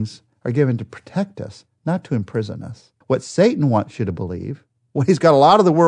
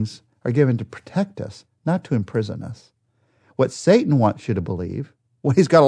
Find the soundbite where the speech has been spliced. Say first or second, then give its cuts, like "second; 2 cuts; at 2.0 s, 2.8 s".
first; 1 cut; at 3.0 s